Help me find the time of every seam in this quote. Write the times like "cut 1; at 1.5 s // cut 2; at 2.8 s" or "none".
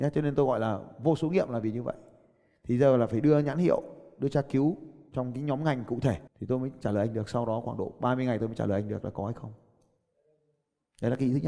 cut 1; at 6.3 s